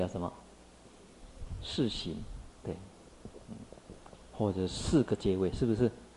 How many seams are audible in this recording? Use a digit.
0